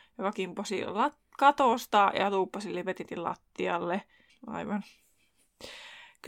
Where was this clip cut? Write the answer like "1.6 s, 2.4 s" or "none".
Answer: 4.3 s